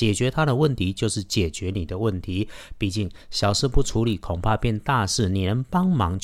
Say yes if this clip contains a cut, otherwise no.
no